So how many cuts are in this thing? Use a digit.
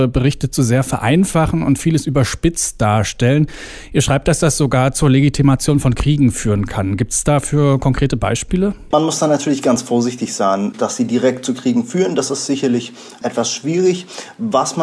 1